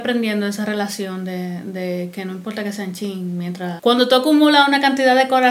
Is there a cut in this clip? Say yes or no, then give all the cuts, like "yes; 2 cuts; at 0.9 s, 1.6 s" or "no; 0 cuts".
yes; 1 cut; at 3.8 s